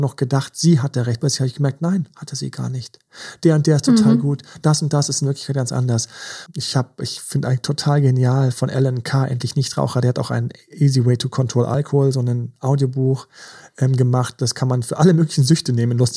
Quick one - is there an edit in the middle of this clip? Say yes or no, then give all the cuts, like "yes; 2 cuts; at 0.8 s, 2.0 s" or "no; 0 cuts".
yes; 1 cut; at 6.5 s